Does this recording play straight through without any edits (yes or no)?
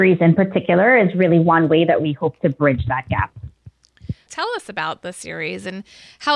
no